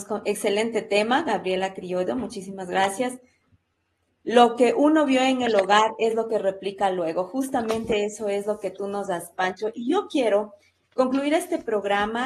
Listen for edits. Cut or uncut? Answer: cut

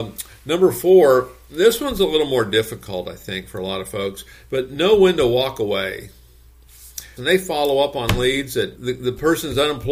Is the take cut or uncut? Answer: cut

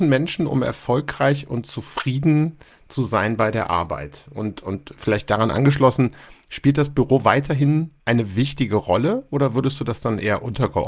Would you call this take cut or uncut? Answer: cut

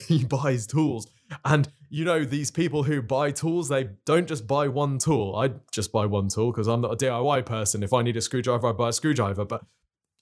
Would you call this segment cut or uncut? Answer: uncut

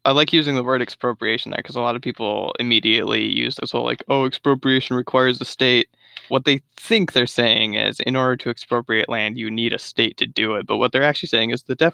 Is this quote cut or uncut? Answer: cut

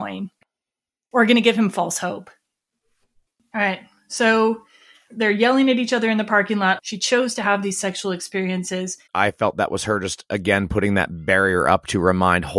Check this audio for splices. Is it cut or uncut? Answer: cut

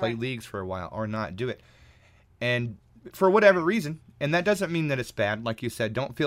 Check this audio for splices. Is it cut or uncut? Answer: uncut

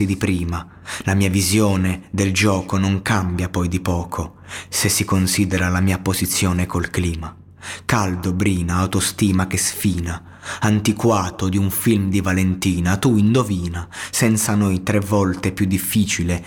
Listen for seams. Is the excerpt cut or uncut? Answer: uncut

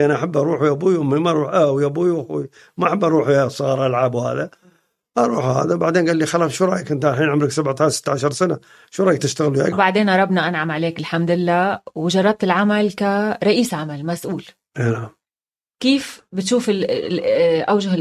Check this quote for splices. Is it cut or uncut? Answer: cut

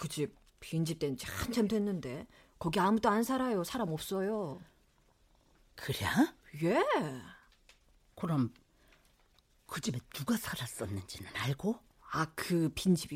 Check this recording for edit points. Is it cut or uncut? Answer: uncut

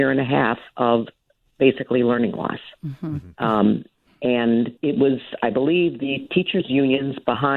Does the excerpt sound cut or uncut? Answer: cut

